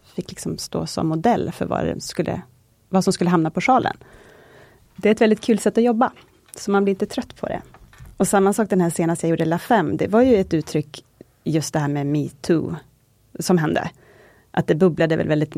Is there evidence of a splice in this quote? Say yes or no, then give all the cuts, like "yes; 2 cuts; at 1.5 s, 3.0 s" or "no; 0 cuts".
no; 0 cuts